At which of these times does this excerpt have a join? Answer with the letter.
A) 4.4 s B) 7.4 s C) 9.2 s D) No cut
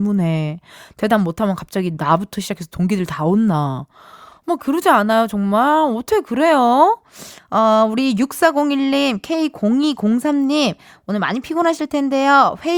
B